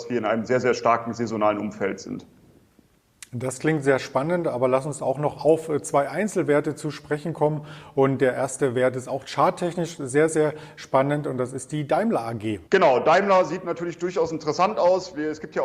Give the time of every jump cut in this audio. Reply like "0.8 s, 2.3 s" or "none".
12.6 s